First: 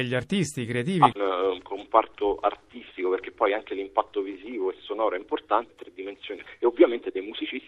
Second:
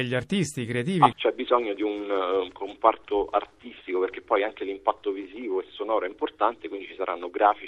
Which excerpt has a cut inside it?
first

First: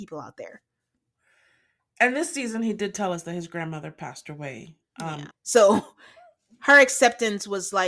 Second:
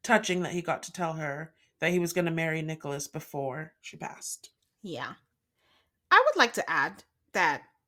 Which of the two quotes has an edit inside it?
first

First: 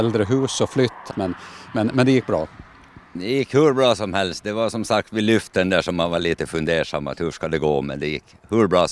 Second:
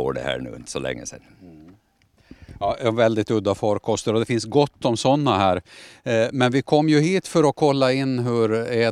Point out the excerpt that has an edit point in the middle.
first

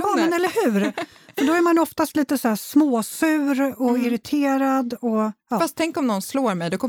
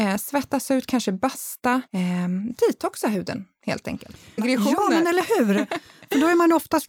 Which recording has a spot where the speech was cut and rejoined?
second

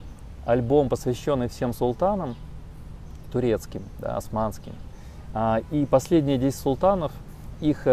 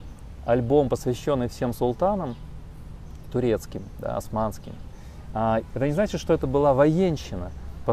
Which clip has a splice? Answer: second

